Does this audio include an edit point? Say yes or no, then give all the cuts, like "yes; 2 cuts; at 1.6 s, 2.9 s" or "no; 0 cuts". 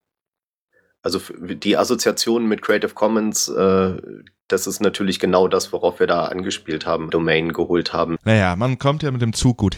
yes; 2 cuts; at 7.1 s, 8.2 s